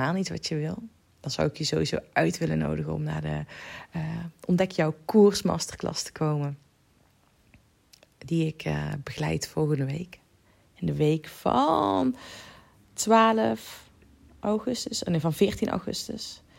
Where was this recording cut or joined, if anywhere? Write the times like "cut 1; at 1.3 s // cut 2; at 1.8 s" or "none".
none